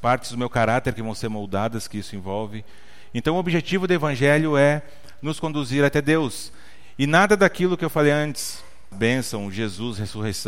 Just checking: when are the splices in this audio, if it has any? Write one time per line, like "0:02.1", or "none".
0:08.9